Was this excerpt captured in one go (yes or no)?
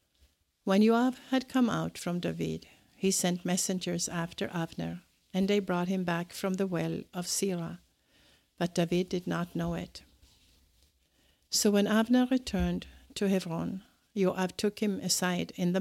yes